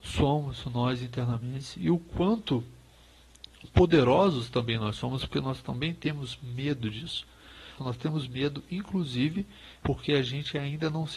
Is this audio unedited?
no; 2 cuts; at 7.8 s, 9.8 s

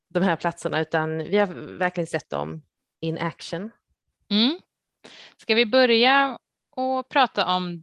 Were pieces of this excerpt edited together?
no; 0 cuts

